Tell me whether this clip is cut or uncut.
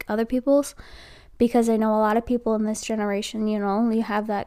uncut